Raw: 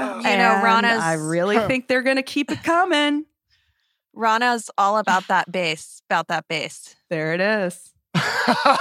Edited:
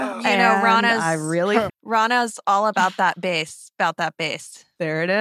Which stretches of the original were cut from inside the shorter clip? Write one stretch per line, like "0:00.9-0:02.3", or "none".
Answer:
0:01.7-0:04.0